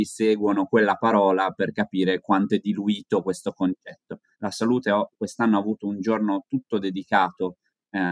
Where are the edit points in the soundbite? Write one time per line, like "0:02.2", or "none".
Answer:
0:04.3